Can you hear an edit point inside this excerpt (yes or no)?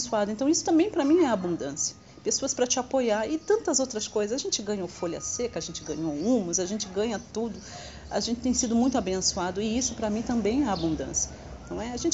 no